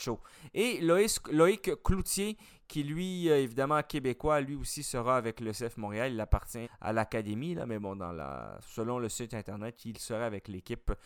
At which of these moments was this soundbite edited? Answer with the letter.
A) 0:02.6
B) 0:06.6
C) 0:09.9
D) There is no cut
B